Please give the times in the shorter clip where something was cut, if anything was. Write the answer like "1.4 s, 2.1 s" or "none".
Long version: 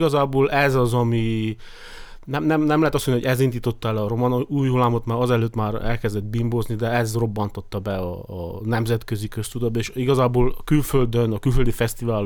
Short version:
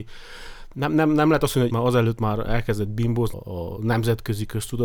1.7 s, 3.3 s